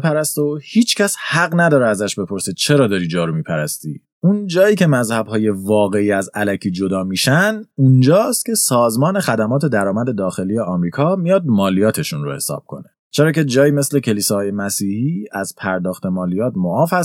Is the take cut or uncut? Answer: cut